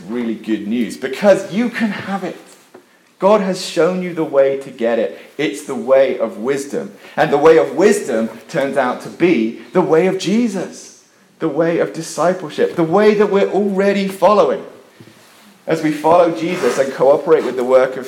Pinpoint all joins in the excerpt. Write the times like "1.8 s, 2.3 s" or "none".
none